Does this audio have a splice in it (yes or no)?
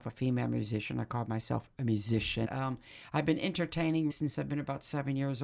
yes